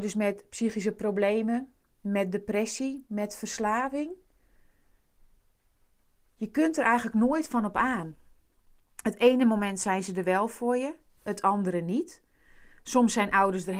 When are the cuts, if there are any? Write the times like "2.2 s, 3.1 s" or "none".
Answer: none